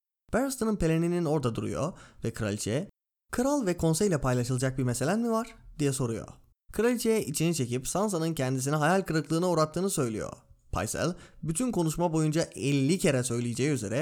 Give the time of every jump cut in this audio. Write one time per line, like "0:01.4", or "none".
0:06.5